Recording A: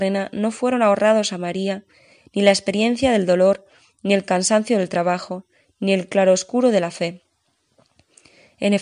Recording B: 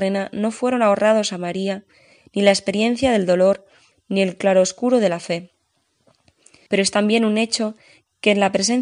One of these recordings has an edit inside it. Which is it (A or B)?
B